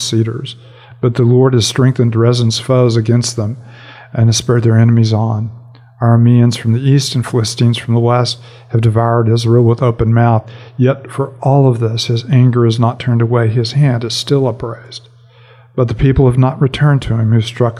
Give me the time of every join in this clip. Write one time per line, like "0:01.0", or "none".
none

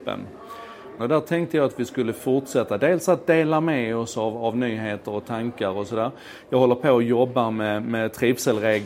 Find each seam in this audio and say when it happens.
0:01.0

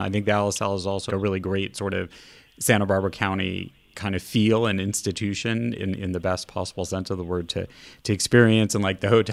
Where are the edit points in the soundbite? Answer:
0:01.1

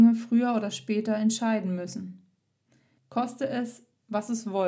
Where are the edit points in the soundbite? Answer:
0:03.0

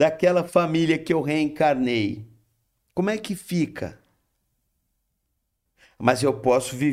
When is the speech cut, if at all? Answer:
none

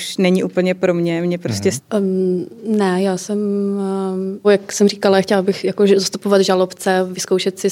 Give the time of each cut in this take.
0:01.8
0:04.4

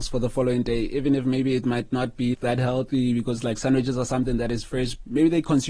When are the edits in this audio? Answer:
0:02.3

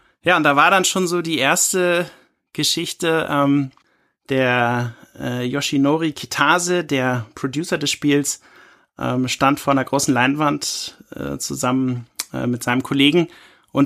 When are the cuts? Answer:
none

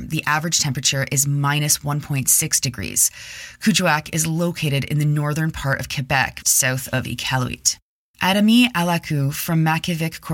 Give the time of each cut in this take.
0:06.4

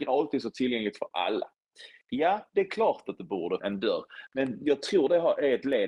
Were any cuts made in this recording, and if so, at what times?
0:03.6

